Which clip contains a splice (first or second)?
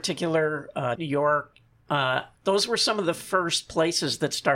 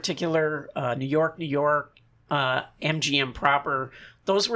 first